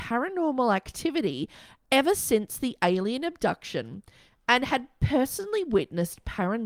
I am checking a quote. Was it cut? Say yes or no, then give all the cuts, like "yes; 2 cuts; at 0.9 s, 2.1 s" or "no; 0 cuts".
no; 0 cuts